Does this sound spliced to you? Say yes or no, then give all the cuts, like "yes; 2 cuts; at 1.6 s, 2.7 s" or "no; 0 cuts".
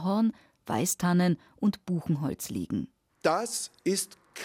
no; 0 cuts